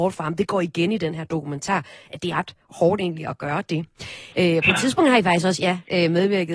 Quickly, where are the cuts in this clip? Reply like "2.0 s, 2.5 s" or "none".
2.3 s, 4.3 s